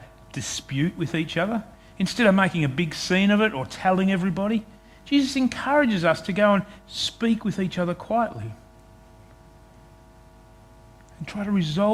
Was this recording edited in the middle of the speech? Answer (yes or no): no